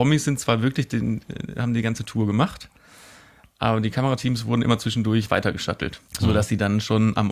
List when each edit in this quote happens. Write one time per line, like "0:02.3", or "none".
0:06.1